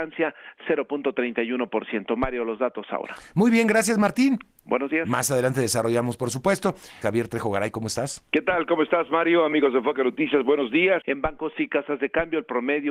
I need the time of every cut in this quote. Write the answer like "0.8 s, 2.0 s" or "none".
7.0 s, 11.0 s